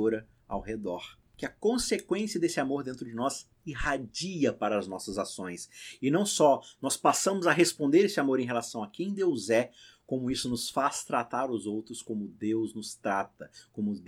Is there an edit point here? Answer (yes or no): yes